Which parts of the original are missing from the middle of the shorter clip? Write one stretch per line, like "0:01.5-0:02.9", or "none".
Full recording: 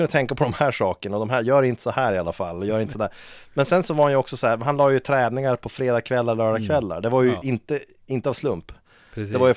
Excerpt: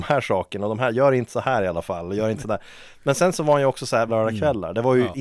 0:04.6-0:06.4